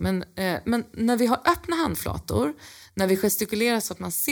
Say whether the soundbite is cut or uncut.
uncut